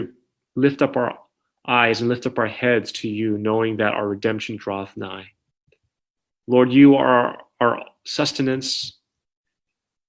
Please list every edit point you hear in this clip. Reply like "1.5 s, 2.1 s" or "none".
none